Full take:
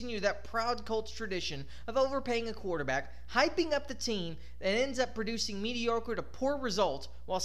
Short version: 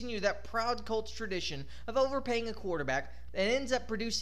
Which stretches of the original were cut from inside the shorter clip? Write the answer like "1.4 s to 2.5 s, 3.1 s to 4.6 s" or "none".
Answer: 3.3 s to 4.6 s